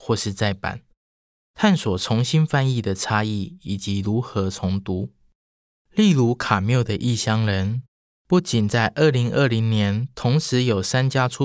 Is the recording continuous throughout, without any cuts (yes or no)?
yes